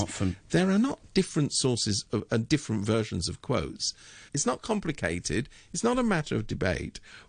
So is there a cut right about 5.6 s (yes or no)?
no